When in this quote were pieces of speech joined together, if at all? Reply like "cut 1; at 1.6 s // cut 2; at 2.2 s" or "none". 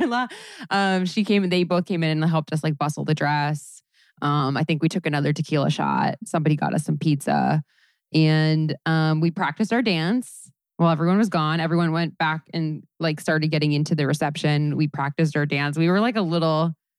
none